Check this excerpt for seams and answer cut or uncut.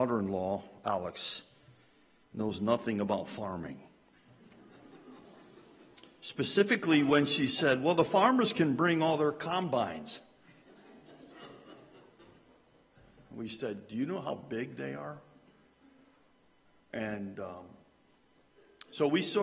uncut